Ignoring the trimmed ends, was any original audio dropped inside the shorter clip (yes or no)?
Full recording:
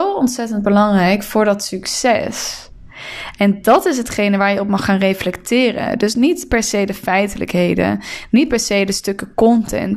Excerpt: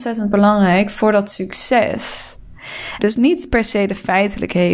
yes